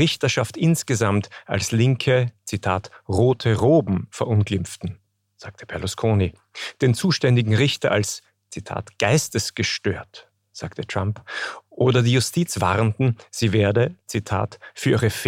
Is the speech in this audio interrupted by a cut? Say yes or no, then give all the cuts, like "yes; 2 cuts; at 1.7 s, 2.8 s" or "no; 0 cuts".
no; 0 cuts